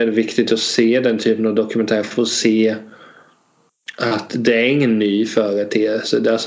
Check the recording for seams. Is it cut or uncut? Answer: uncut